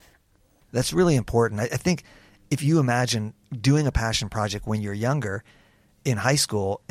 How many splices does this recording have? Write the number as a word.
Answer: zero